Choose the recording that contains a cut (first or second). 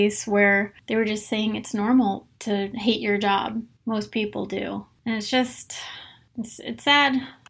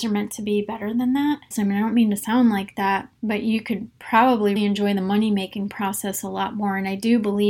second